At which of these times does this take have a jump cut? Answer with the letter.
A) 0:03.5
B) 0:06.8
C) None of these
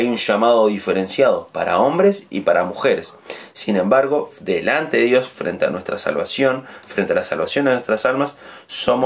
C